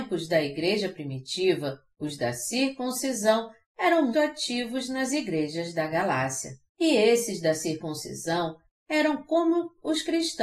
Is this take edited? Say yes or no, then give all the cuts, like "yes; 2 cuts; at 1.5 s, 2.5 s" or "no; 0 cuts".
yes; 2 cuts; at 4.1 s, 6.7 s